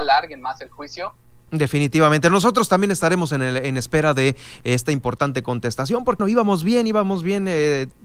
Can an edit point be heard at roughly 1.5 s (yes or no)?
yes